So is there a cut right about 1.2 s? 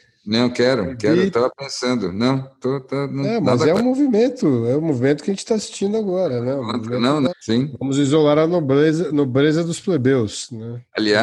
no; 1 cut; at 7.3 s

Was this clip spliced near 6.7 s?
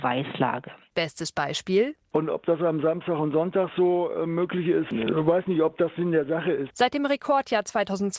yes; 2 cuts; at 2.1 s, 6.7 s

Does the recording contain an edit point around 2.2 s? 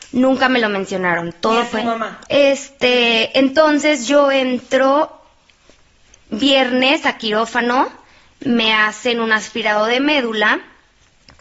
yes; 1 cut; at 2.2 s

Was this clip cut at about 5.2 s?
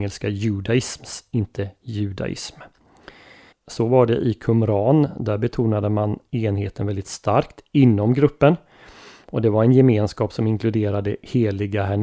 no; 1 cut; at 3.5 s

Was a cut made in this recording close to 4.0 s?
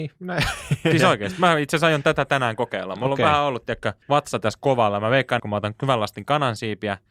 yes; 2 cuts; at 4.0 s, 5.4 s

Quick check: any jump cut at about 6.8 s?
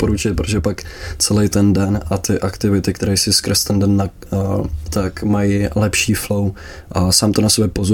no; 1 cut; at 4.9 s

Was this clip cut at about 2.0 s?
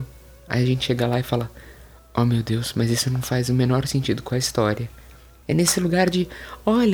no; 1 cut; at 5.4 s

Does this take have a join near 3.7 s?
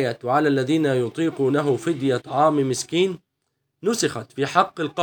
no; 1 cut; at 2.2 s

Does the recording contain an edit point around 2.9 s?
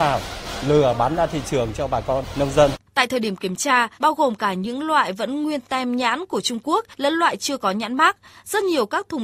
yes; 2 cuts; at 2.9 s, 4.0 s

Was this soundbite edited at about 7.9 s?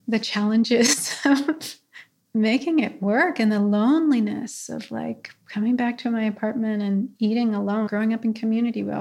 yes; 1 cut; at 7.9 s

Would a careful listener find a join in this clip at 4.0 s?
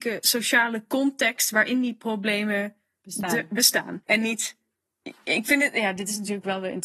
yes; 1 cut; at 4.0 s

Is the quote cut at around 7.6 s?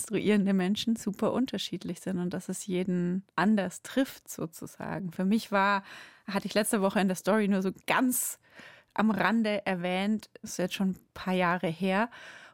no; 2 cuts; at 3.3 s, 10.4 s

